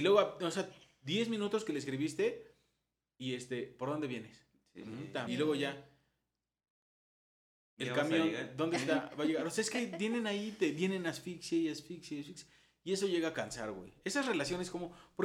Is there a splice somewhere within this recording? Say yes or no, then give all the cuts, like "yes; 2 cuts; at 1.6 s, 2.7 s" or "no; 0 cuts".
yes; 1 cut; at 5.3 s